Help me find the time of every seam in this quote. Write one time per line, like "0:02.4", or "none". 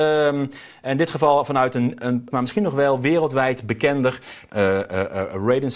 0:02.3
0:04.5